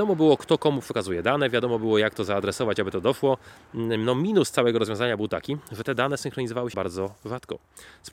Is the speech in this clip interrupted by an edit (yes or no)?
yes